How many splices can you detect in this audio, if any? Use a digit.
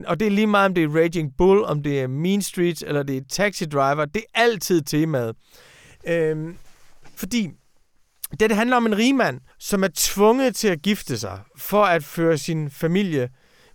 2